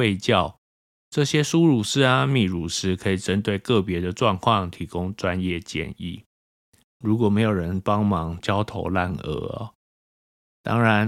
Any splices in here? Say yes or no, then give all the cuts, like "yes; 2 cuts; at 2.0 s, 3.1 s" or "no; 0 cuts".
yes; 2 cuts; at 7.0 s, 8.4 s